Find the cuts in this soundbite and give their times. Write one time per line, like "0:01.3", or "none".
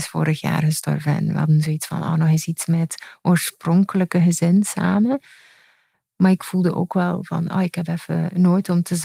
none